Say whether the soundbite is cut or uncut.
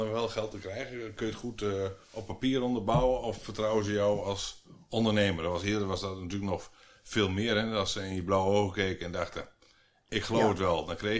uncut